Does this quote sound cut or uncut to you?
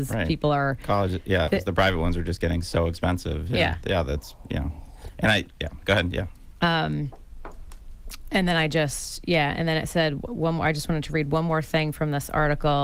cut